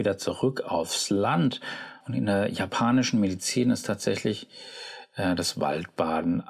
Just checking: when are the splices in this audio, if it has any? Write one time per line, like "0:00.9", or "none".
0:02.0